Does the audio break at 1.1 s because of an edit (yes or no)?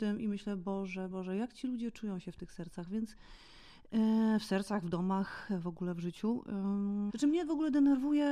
yes